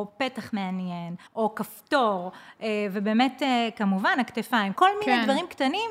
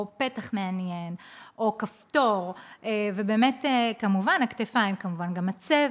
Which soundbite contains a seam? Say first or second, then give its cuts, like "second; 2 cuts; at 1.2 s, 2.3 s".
first; 2 cuts; at 1.3 s, 4.7 s